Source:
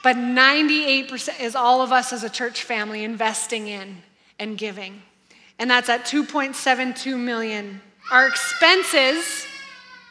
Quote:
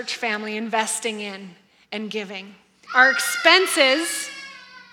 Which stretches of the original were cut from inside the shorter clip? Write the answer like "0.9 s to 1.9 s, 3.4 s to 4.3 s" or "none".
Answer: 5.3 s to 8.0 s